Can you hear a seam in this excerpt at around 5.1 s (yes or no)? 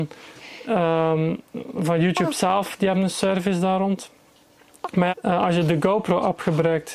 yes